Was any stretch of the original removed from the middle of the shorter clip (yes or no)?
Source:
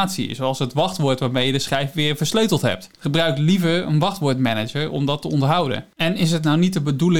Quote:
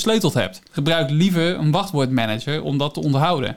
no